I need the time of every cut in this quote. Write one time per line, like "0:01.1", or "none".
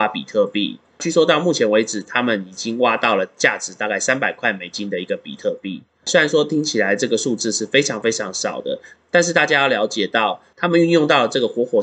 none